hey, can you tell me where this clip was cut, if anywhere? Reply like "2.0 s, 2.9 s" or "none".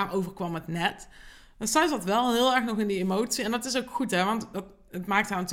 none